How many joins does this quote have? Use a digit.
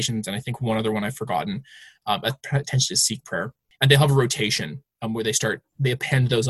0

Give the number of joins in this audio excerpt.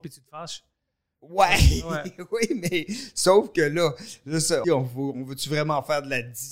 1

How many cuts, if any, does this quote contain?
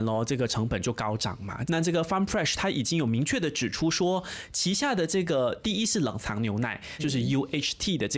2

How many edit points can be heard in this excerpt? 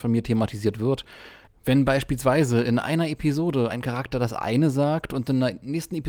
0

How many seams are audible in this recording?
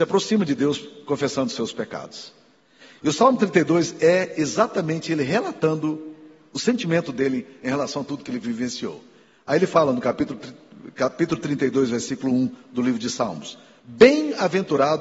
0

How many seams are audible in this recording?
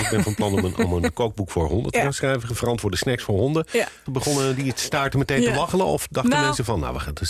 1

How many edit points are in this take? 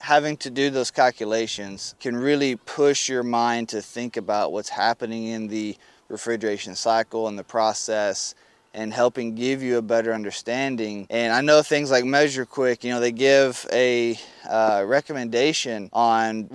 0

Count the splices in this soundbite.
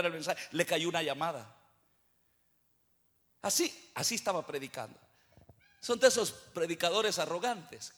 1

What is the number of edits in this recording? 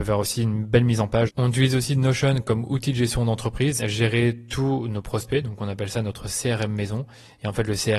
2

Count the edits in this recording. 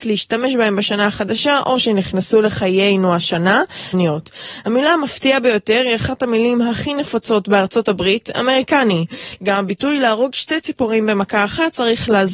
2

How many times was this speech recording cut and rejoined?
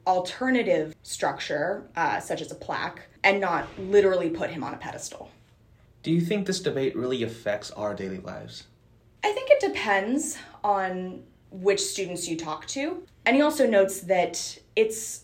1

